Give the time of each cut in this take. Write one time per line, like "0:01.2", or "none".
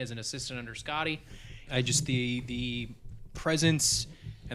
0:01.7